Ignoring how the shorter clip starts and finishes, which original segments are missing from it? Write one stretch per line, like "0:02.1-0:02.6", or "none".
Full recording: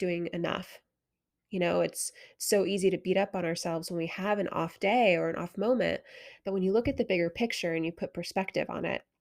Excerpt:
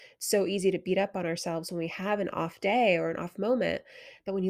none

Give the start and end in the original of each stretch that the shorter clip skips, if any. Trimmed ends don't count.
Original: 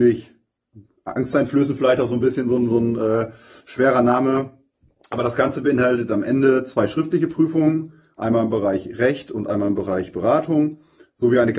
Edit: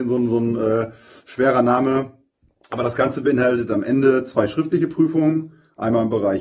none

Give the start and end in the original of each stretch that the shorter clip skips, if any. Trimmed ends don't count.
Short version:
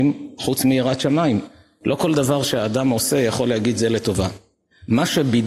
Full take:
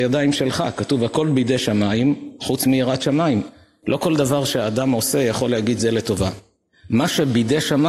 none

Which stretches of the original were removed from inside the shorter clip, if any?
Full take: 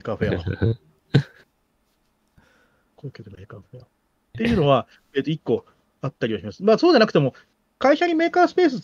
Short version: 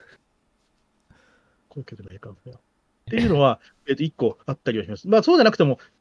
0:05.7-0:06.0

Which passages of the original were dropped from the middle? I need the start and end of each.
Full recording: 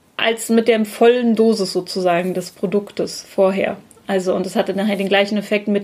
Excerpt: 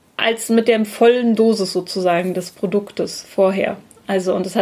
none

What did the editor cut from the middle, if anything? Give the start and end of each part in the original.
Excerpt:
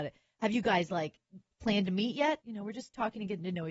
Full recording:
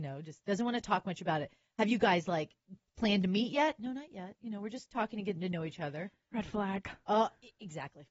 0:03.8-0:04.4

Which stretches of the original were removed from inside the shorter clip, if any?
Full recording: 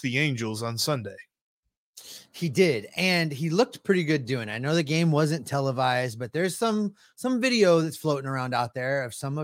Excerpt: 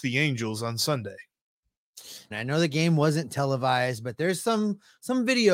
0:02.3-0:04.5

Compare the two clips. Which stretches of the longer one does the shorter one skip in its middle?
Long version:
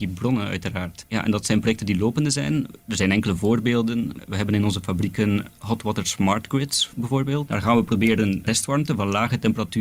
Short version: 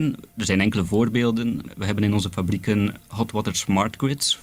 none

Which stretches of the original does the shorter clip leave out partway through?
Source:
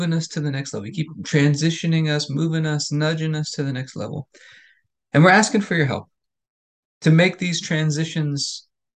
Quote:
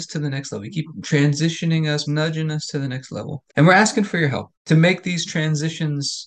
0:02.3-0:02.9
0:04.3-0:05.1
0:06.1-0:06.9

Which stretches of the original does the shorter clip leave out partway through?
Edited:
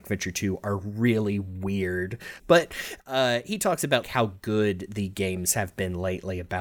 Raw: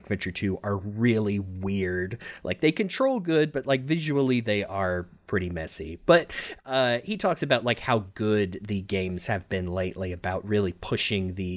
0:02.4-0:06.0
0:07.6-0:07.8

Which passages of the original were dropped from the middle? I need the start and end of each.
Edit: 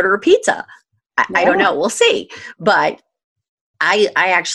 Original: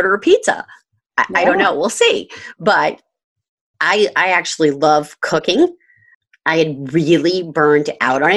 none

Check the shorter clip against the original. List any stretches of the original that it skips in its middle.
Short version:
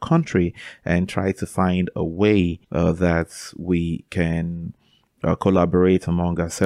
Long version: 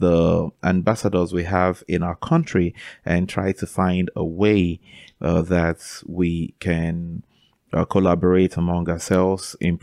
0:04.8-0:05.1

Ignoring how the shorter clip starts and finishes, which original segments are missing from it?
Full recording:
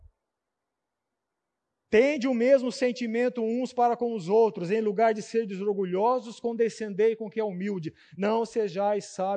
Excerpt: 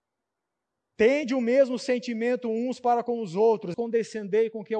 0:04.7-0:06.4

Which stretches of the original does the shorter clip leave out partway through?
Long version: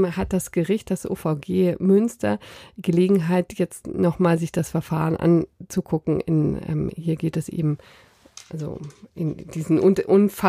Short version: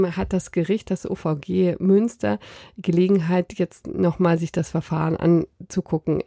none

